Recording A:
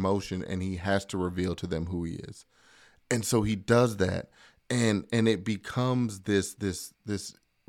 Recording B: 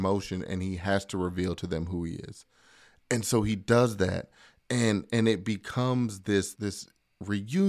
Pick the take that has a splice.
B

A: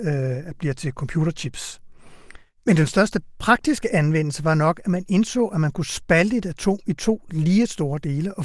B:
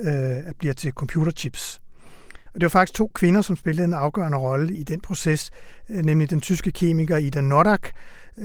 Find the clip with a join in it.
B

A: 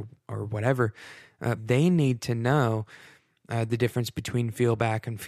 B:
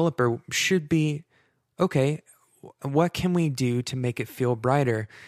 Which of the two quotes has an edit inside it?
A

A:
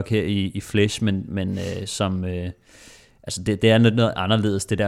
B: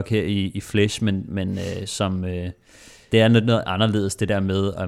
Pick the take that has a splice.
B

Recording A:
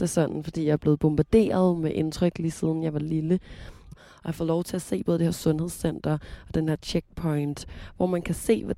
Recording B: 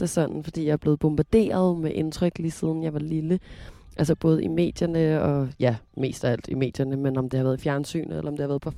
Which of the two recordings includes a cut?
A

